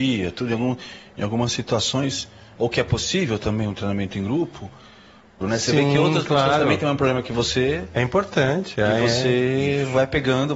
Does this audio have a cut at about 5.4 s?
yes; 1 cut; at 5.4 s

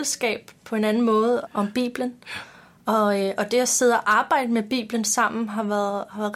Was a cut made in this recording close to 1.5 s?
yes; 1 cut; at 1.5 s

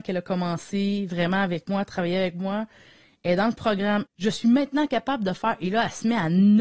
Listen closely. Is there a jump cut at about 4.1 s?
yes; 1 cut; at 4.1 s

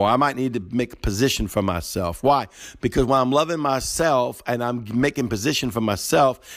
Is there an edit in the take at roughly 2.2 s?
no; 0 cuts

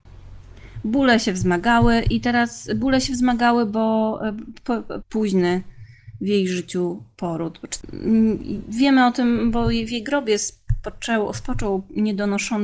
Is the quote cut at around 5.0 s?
yes; 1 cut; at 5.0 s

